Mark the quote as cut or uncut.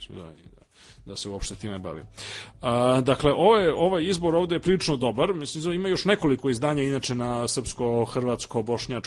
uncut